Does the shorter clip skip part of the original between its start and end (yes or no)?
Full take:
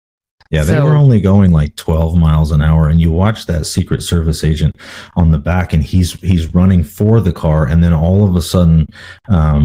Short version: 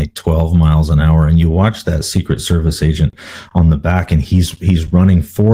no